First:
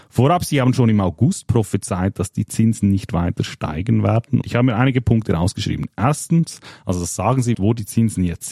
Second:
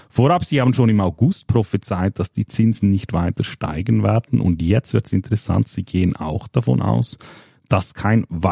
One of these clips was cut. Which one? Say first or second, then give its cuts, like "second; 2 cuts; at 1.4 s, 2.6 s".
first; 2 cuts; at 4.4 s, 7.5 s